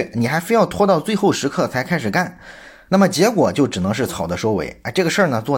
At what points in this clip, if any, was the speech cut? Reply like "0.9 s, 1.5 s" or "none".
4.1 s

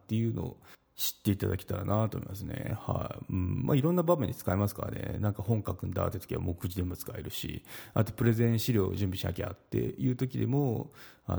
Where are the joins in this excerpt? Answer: none

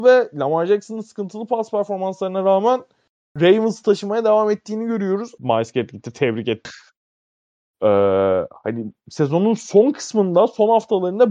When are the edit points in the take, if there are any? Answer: 5.4 s, 6.6 s

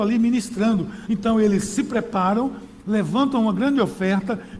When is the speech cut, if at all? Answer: 1.1 s

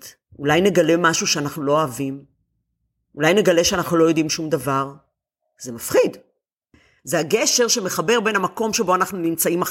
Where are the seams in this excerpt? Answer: 7.0 s

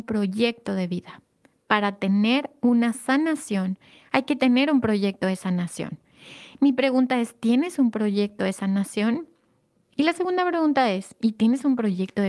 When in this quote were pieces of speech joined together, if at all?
none

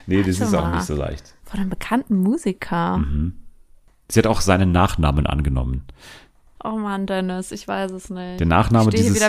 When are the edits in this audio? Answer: 1.4 s

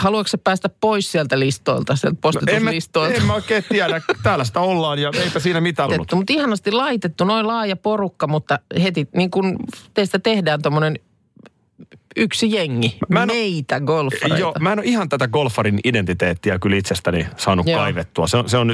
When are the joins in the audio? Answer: 5.9 s

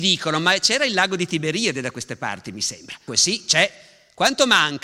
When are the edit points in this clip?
3.1 s

